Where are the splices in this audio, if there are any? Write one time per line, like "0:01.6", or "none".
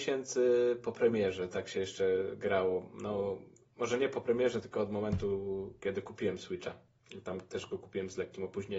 none